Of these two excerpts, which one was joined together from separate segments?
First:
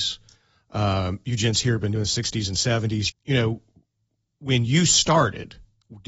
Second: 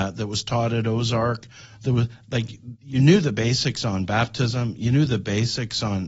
first; 1 cut; at 3.1 s

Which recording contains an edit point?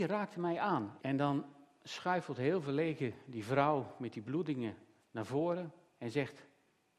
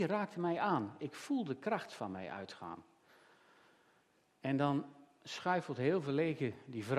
first; 1 cut; at 1.0 s

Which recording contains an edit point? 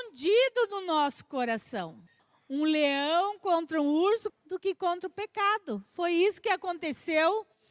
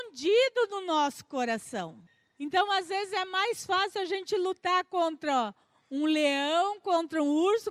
first; 2 cuts; at 2.2 s, 4.3 s

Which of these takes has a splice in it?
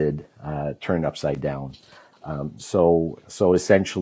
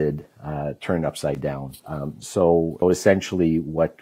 second; 2 cuts; at 1.8 s, 2.8 s

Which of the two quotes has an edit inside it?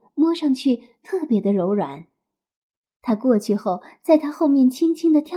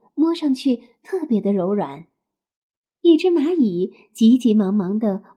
second; 1 cut; at 2.9 s

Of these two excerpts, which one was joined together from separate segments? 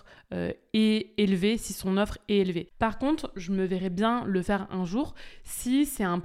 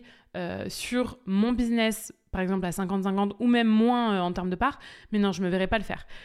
first; 1 cut; at 2.7 s

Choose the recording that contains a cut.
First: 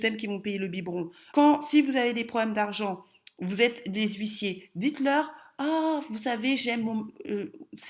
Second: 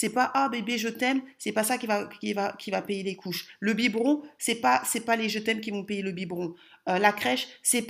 first; 1 cut; at 1.3 s

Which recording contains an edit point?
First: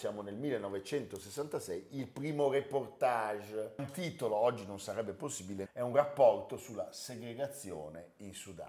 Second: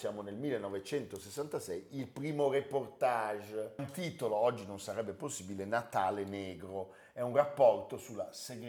first; 1 cut; at 5.7 s

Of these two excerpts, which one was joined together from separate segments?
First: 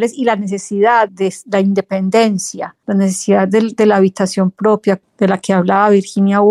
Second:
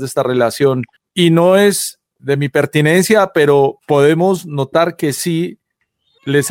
first; 1 cut; at 1.1 s

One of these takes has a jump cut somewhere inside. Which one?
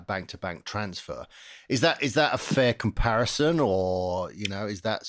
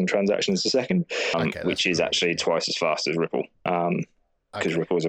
second; 2 cuts; at 1.3 s, 3.5 s

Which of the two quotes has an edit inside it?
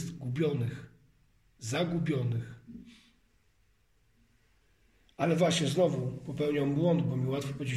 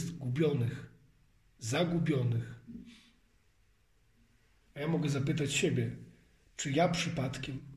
second; 1 cut; at 4.7 s

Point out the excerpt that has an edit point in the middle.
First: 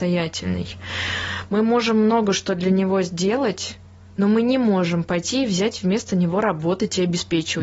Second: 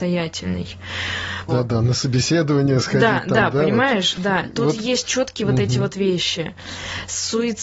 second; 1 cut; at 1.5 s

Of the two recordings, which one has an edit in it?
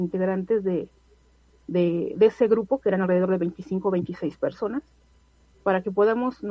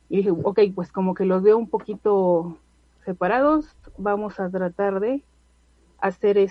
first; 1 cut; at 5.5 s

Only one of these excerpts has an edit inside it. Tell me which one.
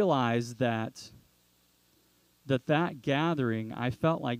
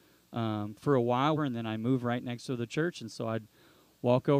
second; 1 cut; at 1.4 s

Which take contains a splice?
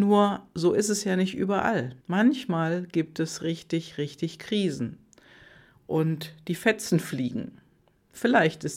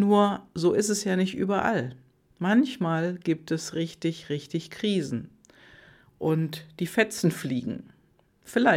first; 1 cut; at 2.0 s

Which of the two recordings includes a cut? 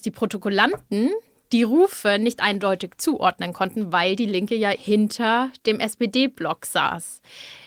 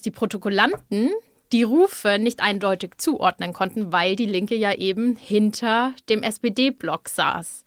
first; 1 cut; at 4.7 s

